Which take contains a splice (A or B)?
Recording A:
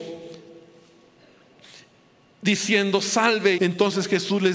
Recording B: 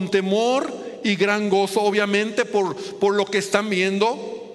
A